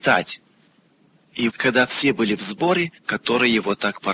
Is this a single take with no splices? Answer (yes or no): no